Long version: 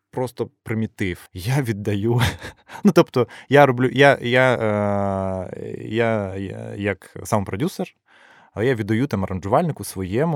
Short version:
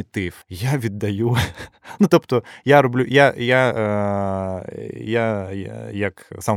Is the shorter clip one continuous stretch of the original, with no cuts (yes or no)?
yes